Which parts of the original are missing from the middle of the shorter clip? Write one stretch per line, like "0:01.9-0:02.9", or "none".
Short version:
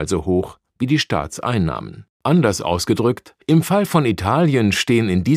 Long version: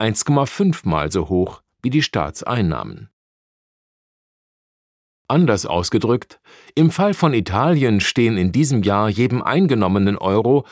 0:03.2-0:05.2
0:06.5-0:06.7